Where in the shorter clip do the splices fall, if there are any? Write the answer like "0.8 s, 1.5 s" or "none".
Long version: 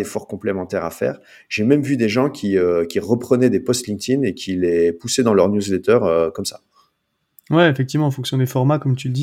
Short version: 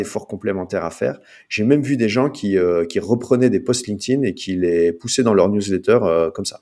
none

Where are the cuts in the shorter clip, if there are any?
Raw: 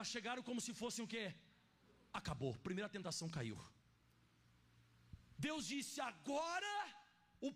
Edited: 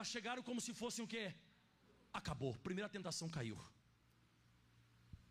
none

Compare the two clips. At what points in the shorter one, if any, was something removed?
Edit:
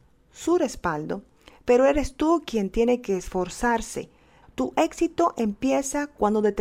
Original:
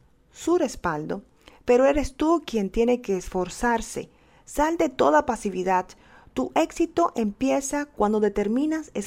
4.4 s

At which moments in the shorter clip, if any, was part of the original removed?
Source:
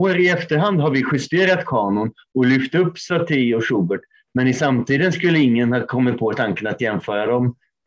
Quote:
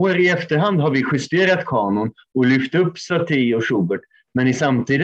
none

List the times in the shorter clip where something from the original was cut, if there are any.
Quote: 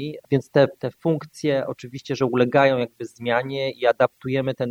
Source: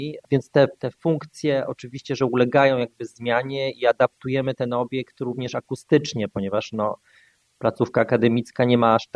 none

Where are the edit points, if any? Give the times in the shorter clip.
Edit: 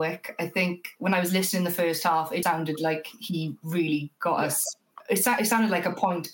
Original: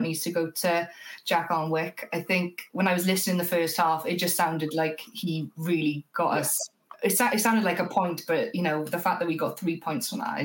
2.4 s

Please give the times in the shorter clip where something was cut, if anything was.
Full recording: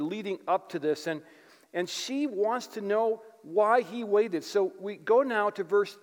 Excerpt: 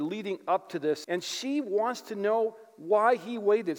1.0 s

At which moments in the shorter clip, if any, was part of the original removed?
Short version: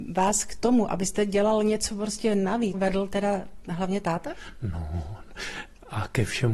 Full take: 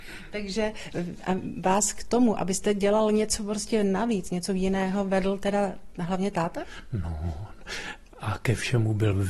2.7 s

